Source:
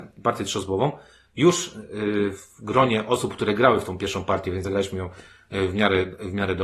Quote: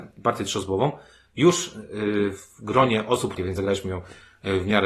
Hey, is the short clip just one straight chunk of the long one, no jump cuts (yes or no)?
no